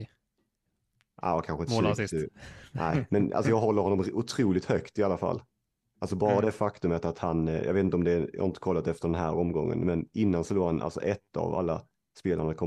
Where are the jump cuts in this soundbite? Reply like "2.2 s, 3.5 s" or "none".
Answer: none